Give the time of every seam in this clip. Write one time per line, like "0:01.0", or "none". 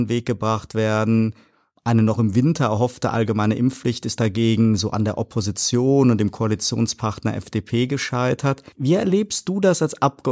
0:08.7

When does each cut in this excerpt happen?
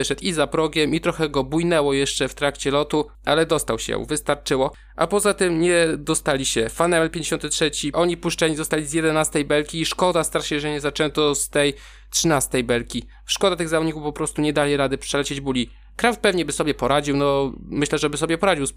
0:07.9

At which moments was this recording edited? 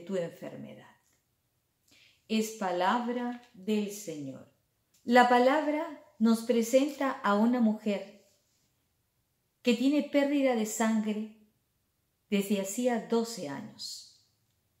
0:04.9

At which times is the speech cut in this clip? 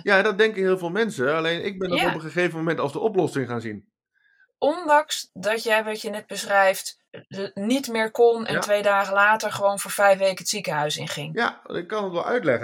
0:05.3

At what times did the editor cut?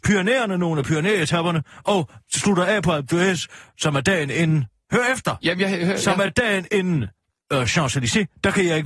none

